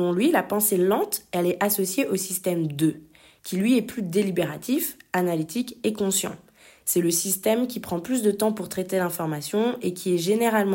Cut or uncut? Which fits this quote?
uncut